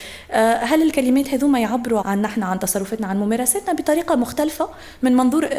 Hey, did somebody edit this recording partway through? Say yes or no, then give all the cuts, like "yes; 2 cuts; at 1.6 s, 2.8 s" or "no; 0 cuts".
yes; 1 cut; at 2.0 s